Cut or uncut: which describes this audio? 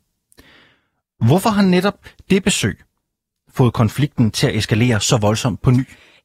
uncut